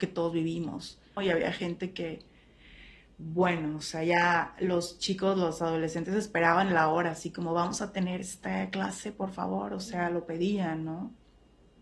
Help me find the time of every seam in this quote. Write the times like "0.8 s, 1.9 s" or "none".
1.2 s